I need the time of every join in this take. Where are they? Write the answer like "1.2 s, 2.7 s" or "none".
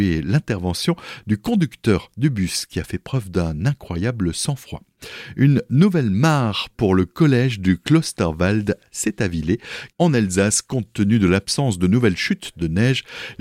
9.9 s